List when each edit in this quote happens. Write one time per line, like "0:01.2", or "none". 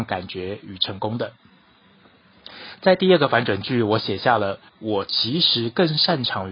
0:04.7